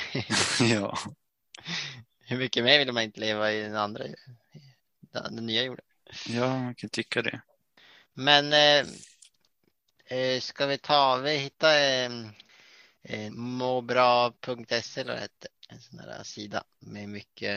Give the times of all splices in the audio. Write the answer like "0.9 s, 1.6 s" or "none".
13.3 s, 15.6 s